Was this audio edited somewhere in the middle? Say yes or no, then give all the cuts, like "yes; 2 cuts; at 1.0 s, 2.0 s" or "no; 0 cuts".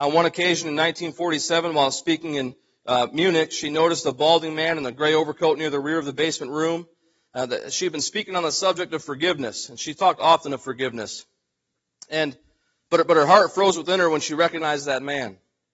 no; 0 cuts